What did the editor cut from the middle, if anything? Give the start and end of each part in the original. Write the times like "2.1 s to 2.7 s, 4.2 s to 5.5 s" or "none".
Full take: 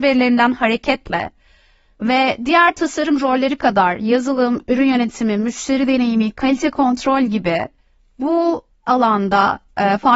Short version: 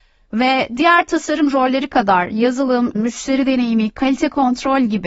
4.6 s to 5.4 s